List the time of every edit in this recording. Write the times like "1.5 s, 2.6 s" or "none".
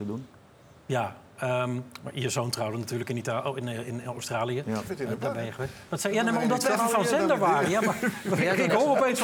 none